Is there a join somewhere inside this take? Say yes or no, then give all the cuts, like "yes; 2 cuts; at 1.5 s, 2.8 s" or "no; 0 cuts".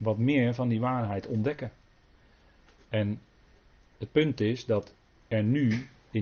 no; 0 cuts